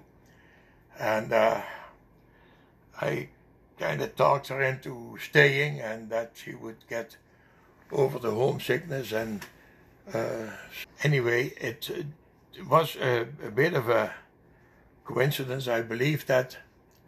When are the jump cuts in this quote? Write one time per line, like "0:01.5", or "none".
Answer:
0:10.8